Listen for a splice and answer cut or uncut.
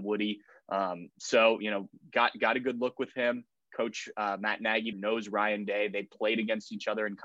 cut